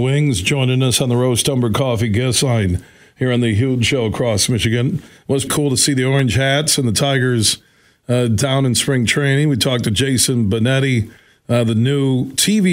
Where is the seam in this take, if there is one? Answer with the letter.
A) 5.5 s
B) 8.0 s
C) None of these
A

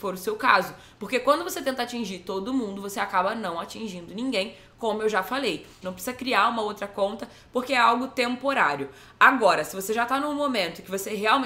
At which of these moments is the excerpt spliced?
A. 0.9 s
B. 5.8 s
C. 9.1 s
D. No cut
B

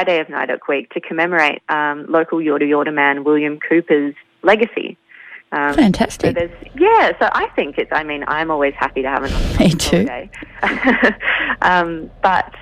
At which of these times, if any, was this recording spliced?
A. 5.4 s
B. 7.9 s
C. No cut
A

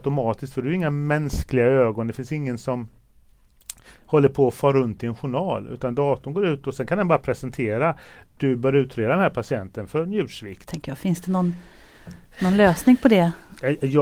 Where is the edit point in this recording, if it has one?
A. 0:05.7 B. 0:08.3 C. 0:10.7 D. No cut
C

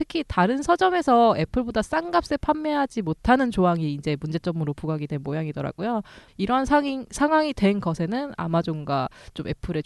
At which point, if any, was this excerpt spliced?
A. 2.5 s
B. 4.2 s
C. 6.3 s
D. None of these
C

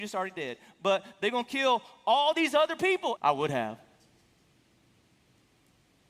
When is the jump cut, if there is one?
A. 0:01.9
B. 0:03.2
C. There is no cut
B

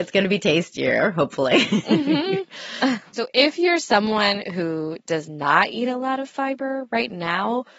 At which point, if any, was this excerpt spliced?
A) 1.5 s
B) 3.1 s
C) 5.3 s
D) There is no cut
B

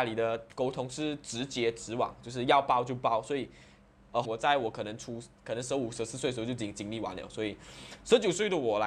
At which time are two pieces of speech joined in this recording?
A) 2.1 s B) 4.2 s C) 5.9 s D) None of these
B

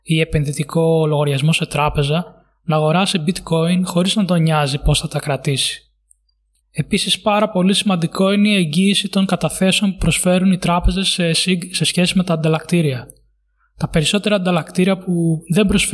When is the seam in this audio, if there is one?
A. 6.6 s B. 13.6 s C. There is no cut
A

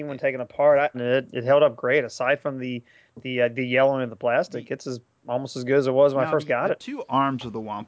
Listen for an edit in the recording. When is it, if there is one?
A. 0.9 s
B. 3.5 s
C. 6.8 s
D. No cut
A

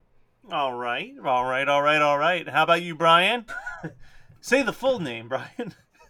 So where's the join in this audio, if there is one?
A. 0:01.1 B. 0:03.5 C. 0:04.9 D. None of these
B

